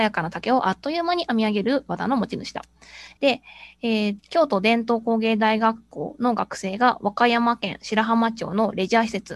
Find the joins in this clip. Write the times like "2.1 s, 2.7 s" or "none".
3.2 s, 4.2 s